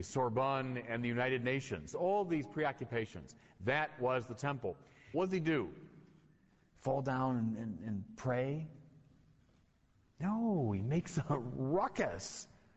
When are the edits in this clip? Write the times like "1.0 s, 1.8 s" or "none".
1.9 s, 5.1 s